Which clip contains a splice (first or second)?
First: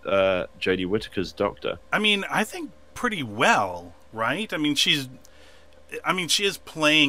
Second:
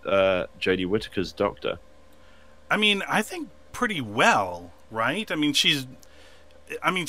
first